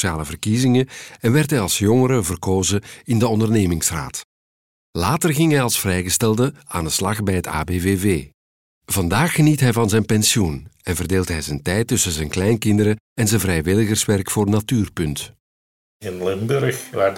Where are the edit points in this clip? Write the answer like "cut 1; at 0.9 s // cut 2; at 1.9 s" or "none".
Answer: none